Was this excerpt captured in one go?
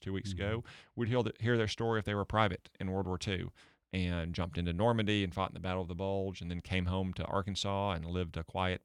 yes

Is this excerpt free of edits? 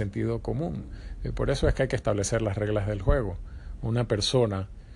no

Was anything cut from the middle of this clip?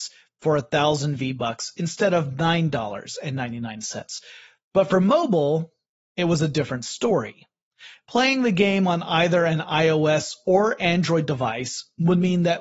no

